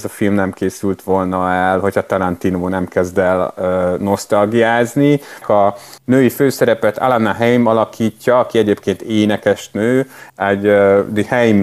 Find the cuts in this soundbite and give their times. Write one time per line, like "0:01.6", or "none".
0:05.4